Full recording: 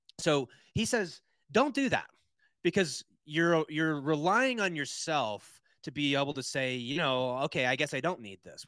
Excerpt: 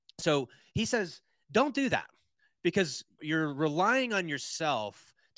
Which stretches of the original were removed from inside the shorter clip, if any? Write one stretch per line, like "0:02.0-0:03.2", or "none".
0:03.2-0:03.7